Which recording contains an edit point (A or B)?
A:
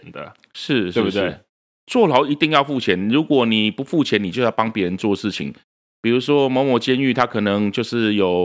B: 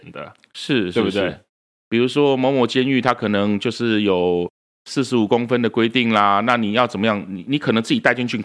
B